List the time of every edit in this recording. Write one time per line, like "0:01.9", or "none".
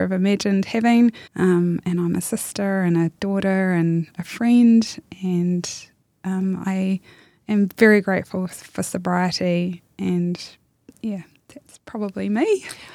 0:01.3

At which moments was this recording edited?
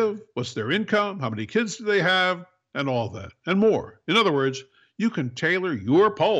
none

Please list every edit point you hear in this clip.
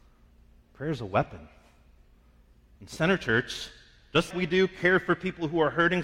0:02.8
0:04.3

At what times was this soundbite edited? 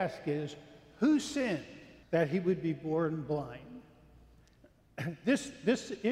0:02.0

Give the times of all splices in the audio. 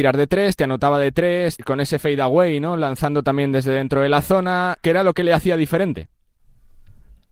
0:01.6
0:04.8

